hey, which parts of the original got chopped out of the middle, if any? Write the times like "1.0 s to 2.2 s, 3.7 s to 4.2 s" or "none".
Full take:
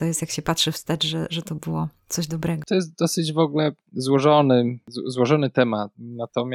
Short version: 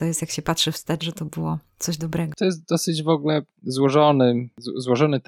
1.0 s to 1.3 s